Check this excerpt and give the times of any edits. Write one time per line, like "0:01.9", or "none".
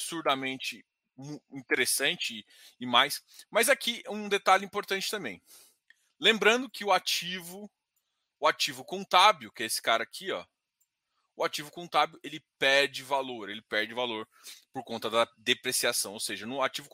none

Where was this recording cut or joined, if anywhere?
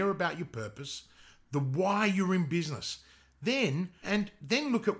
0:04.0

